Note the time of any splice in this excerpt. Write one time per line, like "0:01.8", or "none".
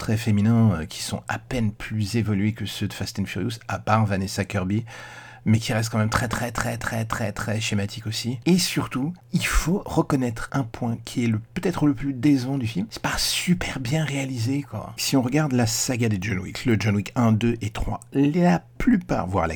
0:06.8
0:15.0